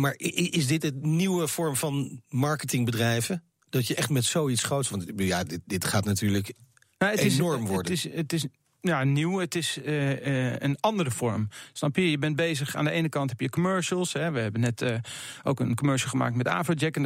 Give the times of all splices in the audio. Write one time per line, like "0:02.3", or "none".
none